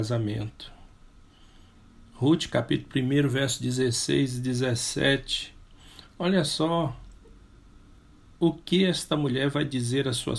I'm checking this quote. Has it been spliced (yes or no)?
no